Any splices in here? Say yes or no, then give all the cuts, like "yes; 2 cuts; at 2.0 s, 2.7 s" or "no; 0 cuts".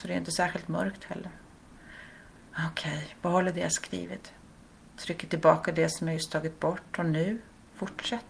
no; 0 cuts